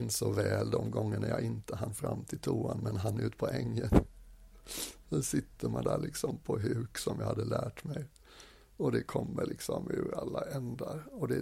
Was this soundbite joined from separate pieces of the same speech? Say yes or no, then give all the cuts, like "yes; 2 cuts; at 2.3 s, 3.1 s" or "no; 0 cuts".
no; 0 cuts